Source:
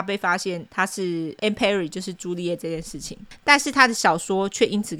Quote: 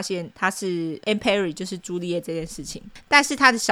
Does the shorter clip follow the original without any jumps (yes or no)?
yes